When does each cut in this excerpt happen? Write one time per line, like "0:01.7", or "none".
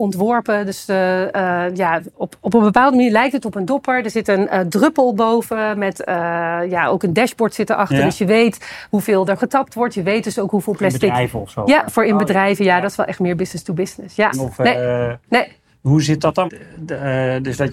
0:14.3
0:16.5